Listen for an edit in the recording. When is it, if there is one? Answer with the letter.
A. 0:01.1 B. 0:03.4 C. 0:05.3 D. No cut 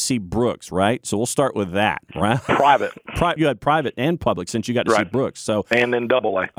B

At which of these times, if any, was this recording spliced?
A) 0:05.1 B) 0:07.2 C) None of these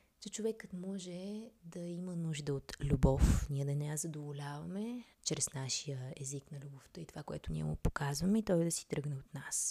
A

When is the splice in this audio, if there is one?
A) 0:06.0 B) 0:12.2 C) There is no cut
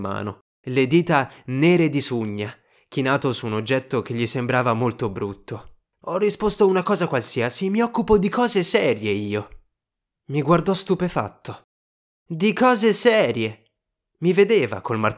A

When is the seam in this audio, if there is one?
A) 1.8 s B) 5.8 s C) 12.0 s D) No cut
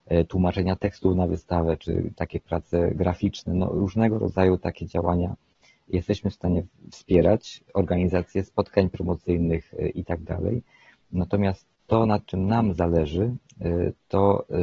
A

